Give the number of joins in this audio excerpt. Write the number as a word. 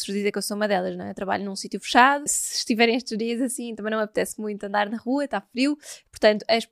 one